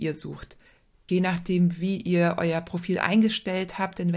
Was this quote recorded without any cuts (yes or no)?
no